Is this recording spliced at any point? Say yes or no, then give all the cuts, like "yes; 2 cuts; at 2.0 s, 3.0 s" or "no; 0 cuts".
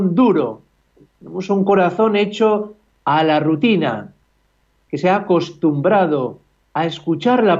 no; 0 cuts